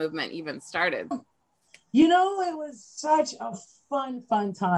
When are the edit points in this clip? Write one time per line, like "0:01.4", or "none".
0:01.1